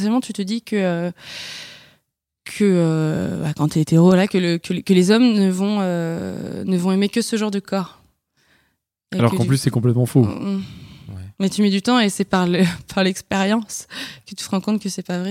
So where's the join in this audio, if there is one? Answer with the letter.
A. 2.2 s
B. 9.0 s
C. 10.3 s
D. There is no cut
D